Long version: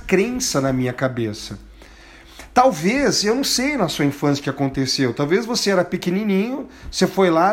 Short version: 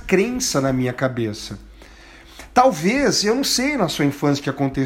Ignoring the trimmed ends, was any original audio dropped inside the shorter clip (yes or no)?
no